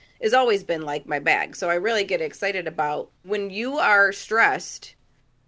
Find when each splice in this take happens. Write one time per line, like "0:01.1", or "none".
0:03.2

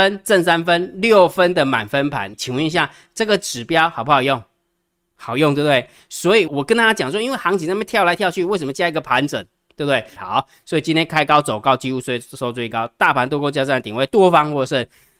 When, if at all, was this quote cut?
0:02.3
0:06.5
0:10.2

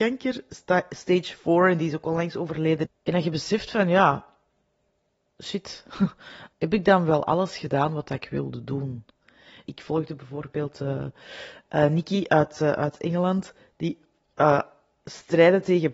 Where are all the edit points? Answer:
0:02.9
0:06.5
0:09.7

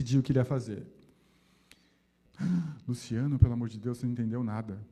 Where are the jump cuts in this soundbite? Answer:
0:02.3

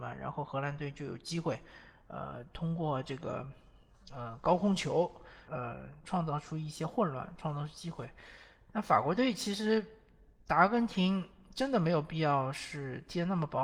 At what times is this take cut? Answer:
0:05.5

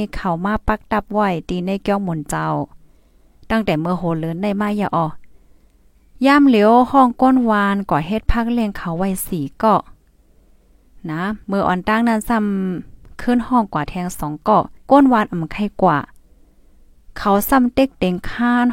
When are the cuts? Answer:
0:11.4
0:14.8

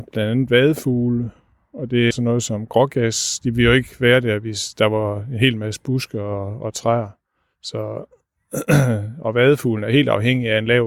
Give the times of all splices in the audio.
0:02.1

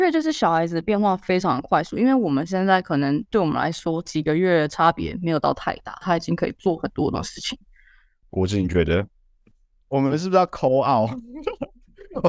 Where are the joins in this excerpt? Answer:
0:06.0
0:08.2

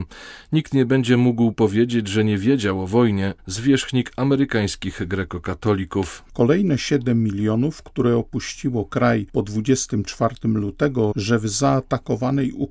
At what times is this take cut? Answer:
0:03.4
0:06.2
0:11.1

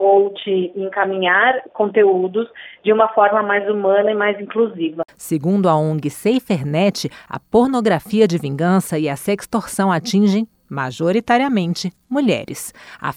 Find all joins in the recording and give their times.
0:05.1

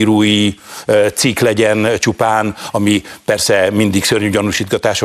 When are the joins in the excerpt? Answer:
none

